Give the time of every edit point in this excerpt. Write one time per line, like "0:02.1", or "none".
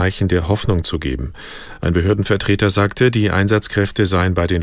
none